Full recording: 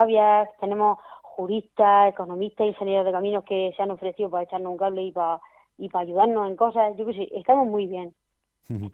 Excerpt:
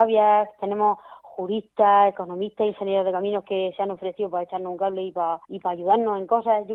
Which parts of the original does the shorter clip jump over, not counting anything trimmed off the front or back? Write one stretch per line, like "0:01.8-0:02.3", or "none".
0:05.4-0:05.7